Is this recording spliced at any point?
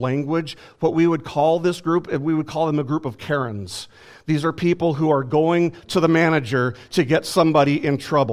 no; 0 cuts

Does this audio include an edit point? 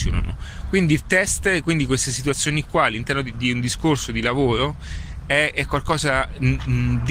no; 0 cuts

